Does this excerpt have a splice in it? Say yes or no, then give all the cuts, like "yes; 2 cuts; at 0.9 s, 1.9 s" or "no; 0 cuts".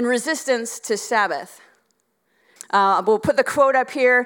yes; 1 cut; at 2.6 s